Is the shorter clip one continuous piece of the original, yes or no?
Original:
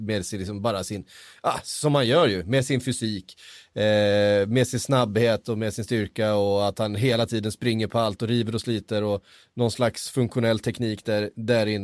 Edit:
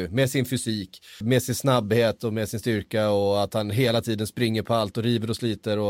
no